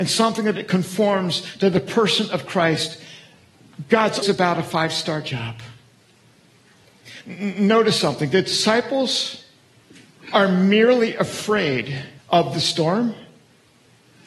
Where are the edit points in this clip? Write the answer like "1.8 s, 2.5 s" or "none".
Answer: 4.2 s, 7.2 s, 12.2 s

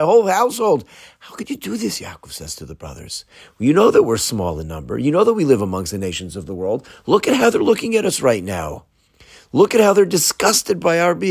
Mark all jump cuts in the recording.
none

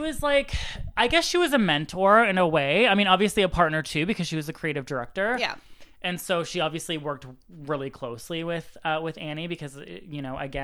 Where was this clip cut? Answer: none

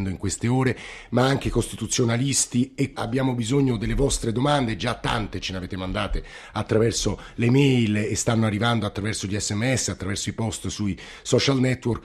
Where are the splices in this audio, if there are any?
2.9 s

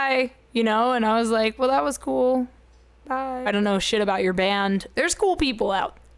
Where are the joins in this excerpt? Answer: 3.5 s, 4.9 s

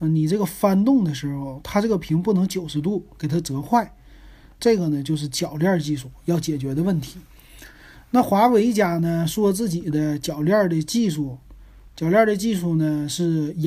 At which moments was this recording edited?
4.6 s

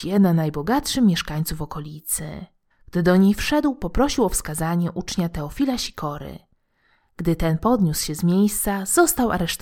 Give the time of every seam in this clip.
2.7 s

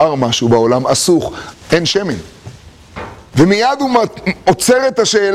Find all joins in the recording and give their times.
1.5 s, 3.3 s

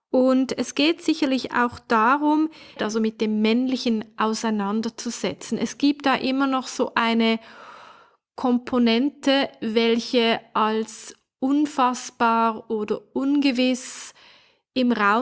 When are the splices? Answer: 2.8 s

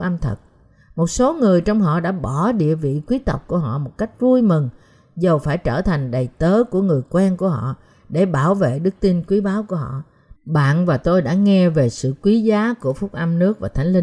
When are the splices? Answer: 10.3 s

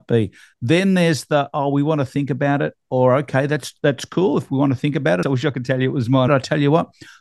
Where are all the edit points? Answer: 5.2 s, 6.3 s

